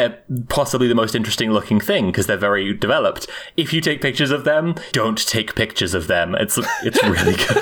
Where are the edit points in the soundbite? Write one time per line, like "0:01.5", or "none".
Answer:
0:04.9